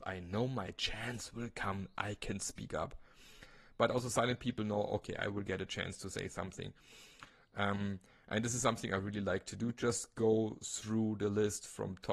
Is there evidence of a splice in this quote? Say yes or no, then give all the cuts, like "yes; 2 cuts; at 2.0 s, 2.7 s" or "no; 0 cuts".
no; 0 cuts